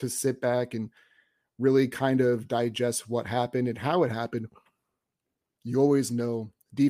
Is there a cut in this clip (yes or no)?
yes